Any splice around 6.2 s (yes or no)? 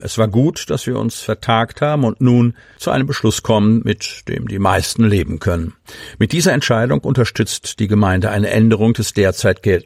no